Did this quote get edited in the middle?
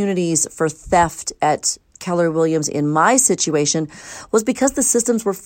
no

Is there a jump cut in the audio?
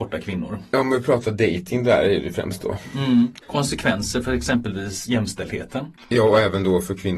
yes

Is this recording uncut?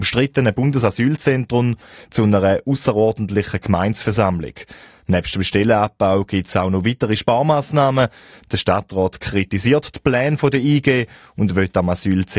no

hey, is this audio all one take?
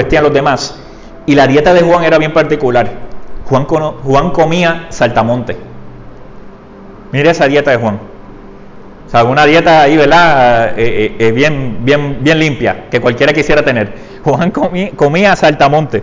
yes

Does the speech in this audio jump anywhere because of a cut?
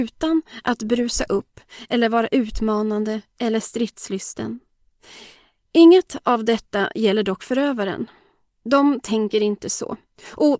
no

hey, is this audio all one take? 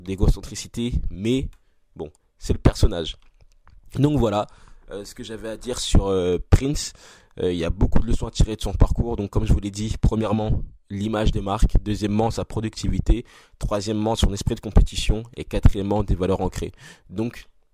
yes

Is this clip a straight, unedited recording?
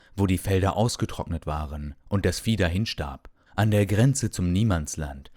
no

